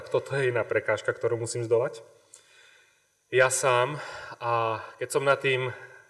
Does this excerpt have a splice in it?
no; 0 cuts

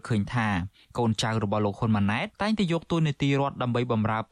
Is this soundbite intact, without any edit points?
no; 1 cut; at 2.3 s

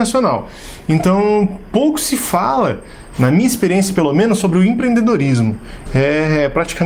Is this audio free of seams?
no; 1 cut; at 5.9 s

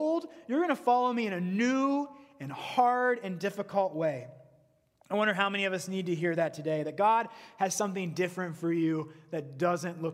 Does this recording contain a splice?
no; 0 cuts

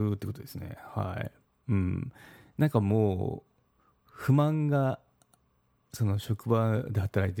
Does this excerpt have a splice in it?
no; 0 cuts

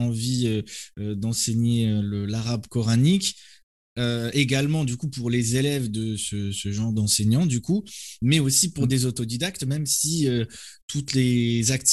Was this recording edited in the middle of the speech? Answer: no; 0 cuts

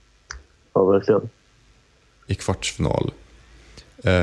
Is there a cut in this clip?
yes; 1 cut; at 2.3 s

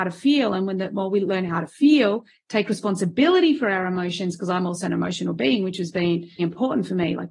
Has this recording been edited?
yes; 1 cut; at 6.4 s

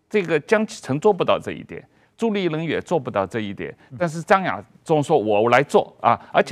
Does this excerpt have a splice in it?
no; 0 cuts

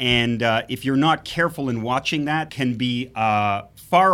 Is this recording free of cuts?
no; 1 cut; at 2.5 s

